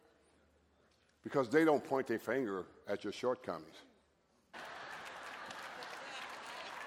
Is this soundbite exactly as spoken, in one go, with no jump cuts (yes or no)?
no